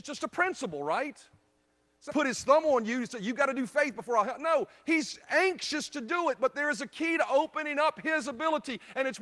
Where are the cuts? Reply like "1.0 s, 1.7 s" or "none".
2.1 s